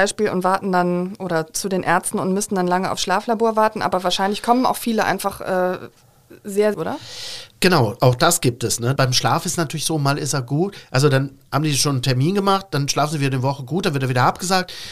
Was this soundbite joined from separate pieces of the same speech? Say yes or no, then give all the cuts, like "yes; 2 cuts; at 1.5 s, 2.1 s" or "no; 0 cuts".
yes; 2 cuts; at 6.7 s, 9.0 s